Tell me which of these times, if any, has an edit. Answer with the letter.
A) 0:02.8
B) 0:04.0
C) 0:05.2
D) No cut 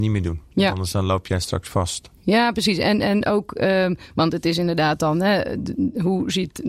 D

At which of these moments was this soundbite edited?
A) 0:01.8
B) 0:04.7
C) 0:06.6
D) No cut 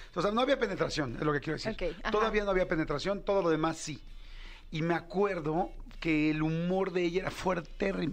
D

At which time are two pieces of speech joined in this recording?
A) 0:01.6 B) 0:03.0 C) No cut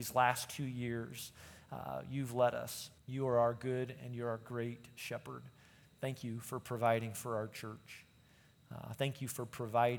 B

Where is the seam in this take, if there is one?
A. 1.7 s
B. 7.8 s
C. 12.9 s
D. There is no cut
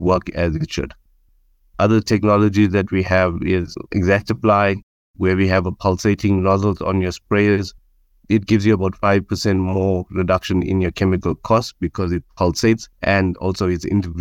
C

